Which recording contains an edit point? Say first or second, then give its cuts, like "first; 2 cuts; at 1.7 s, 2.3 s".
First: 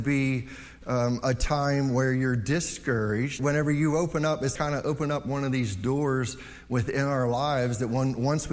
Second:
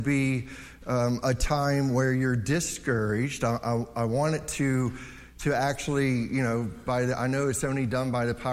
first; 2 cuts; at 3.4 s, 4.6 s